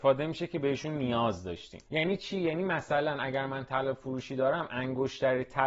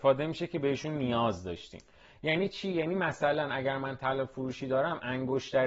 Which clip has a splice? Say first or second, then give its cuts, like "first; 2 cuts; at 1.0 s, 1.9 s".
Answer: first; 1 cut; at 1.9 s